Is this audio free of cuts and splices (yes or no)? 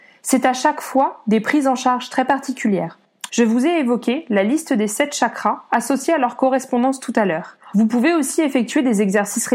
no